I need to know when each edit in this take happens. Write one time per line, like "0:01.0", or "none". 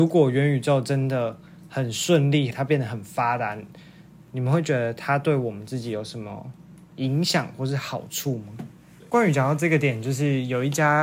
0:02.5
0:09.0